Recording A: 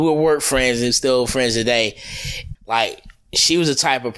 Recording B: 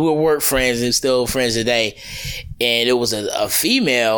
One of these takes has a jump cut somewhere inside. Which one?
A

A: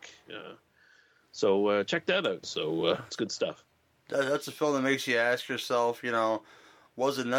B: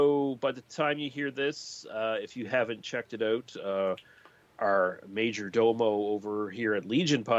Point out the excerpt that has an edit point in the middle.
A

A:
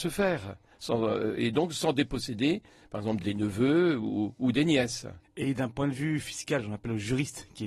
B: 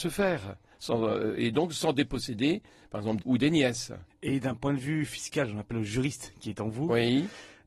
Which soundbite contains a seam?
B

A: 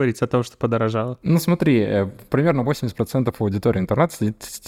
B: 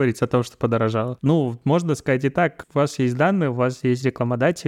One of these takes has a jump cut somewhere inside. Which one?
B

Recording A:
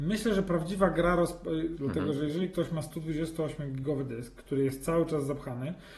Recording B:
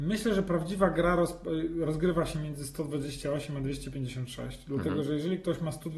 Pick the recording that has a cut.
A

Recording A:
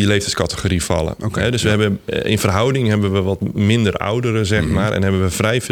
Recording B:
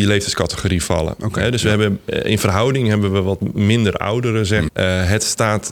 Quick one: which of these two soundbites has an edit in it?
B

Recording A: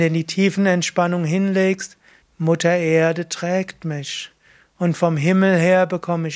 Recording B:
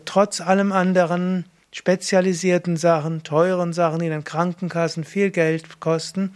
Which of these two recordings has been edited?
A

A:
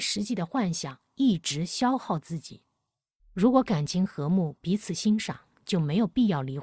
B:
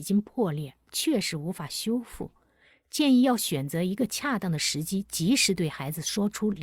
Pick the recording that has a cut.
A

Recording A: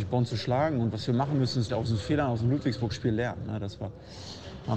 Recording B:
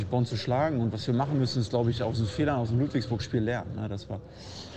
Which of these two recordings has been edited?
A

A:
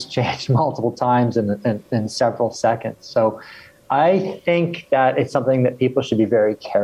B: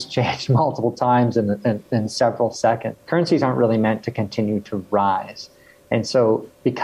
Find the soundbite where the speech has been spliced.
B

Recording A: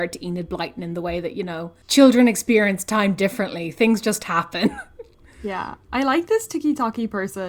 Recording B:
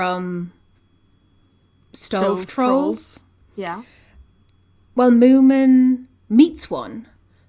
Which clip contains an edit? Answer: A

